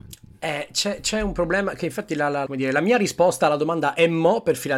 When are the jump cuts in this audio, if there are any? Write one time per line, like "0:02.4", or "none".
0:02.5